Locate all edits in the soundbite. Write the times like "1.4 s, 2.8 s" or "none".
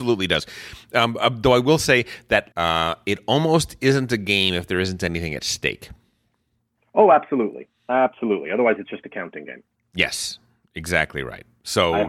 2.5 s